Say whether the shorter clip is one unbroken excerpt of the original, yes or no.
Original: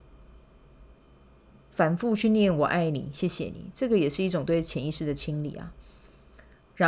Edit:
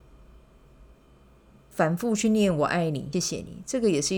no